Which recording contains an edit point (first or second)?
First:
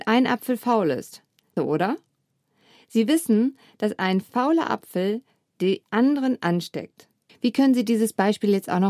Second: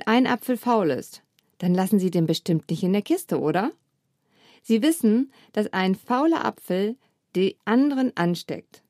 first